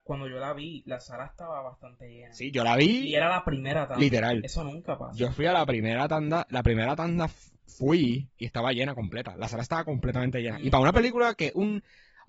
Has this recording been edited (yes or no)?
no